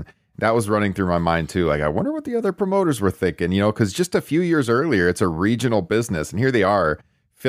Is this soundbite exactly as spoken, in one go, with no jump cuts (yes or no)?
yes